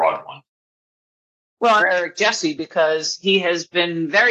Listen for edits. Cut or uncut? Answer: cut